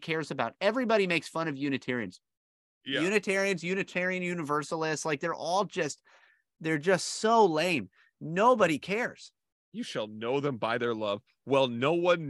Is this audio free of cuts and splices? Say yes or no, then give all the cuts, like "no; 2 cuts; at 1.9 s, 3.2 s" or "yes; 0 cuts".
yes; 0 cuts